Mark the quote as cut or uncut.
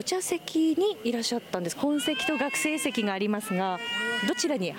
cut